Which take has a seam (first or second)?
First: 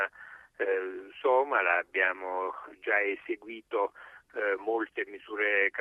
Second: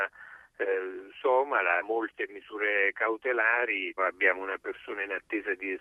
second